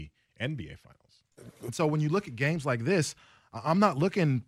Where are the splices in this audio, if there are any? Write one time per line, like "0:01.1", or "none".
0:01.7